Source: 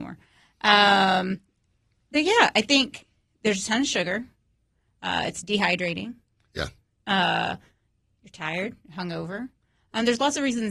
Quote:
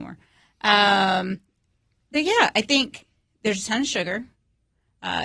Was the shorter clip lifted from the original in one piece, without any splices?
yes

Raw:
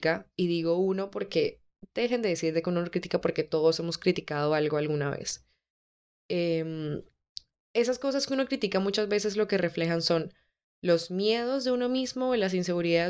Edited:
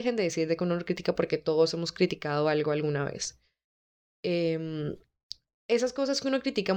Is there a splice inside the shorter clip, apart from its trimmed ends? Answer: no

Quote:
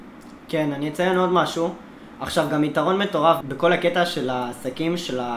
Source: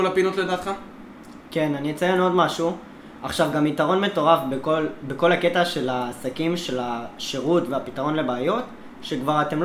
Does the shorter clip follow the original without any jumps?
no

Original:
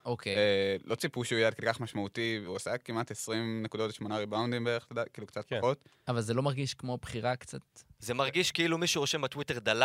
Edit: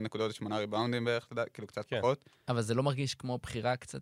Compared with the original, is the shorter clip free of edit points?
yes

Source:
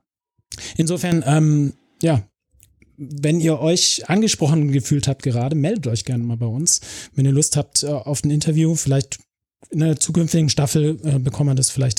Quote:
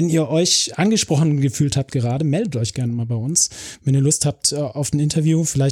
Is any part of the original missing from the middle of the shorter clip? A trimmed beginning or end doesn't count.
no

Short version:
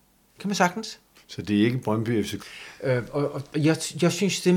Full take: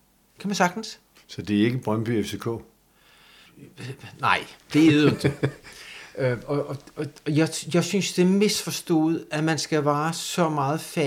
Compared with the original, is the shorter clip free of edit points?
no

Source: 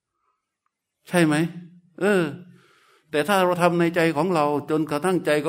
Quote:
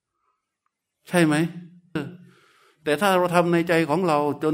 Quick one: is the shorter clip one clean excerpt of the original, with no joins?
no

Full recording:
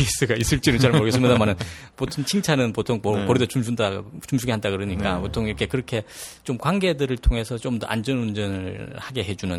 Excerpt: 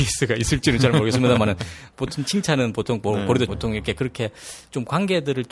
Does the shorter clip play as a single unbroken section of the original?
no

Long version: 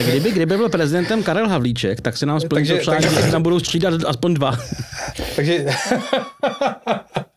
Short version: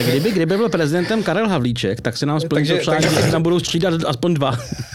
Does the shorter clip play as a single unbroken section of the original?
yes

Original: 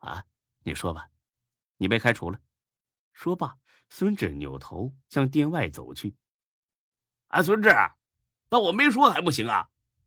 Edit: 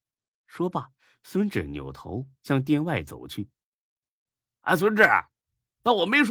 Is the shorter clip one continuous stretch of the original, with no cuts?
yes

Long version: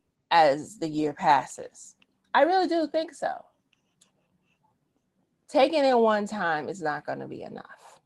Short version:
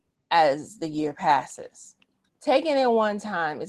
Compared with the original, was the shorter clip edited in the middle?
yes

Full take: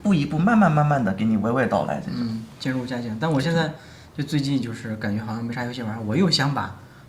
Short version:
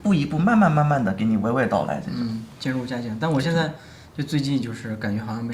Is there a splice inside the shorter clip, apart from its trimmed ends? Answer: no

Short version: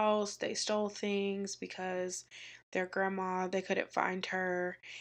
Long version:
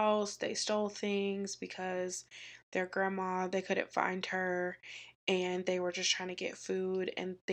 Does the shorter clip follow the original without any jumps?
yes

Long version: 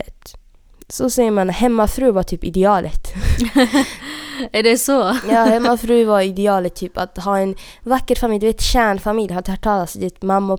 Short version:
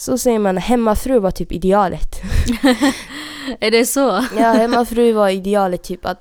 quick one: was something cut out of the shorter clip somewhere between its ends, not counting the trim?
no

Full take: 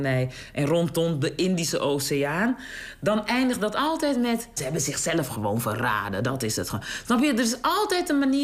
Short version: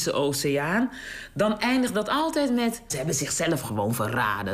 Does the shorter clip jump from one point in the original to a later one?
no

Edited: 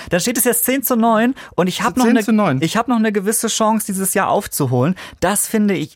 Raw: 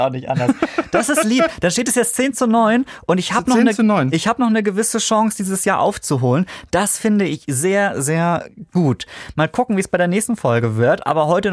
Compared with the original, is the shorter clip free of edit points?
yes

